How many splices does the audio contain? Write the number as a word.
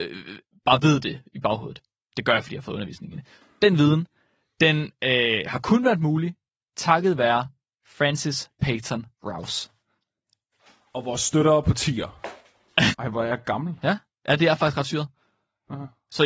one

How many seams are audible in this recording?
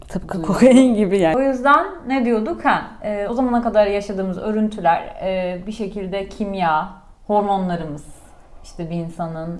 zero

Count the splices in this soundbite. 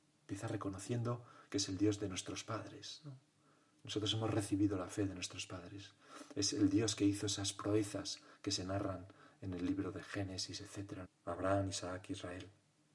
one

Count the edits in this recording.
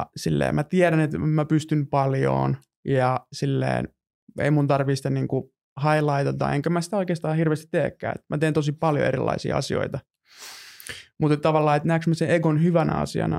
zero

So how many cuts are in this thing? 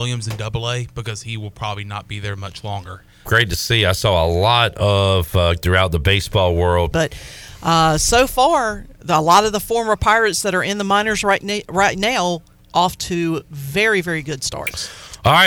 three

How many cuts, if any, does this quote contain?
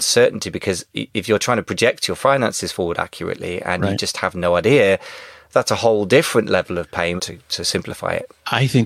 one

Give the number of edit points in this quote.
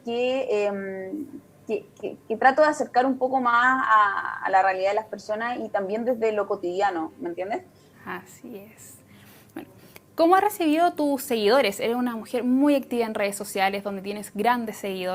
one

